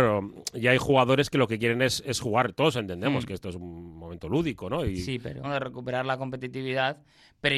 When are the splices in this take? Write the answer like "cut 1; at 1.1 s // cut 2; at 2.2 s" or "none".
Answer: cut 1; at 5.4 s